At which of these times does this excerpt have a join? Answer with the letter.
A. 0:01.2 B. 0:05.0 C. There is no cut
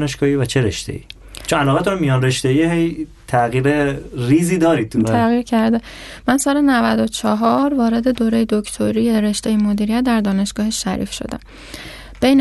B